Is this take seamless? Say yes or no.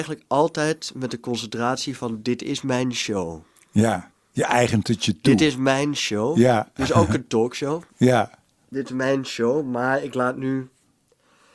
yes